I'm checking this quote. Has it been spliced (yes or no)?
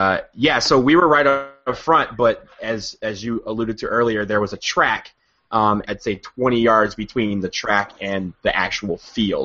yes